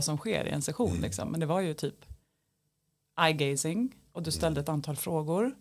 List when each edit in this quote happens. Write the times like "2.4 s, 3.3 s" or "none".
none